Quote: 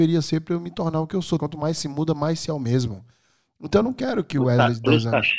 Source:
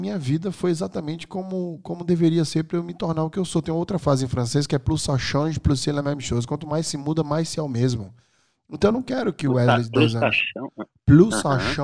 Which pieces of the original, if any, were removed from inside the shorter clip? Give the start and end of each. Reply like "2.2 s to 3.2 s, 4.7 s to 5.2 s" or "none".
3.6 s to 6.5 s